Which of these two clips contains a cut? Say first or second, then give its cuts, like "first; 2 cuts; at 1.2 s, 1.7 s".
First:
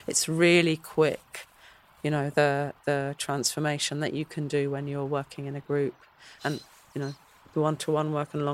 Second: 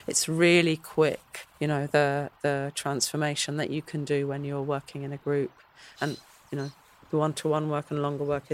second; 1 cut; at 1.5 s